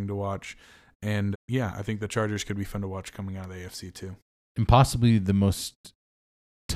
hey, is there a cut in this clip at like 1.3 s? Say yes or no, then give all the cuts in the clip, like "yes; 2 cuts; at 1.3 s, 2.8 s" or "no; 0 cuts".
yes; 1 cut; at 1.3 s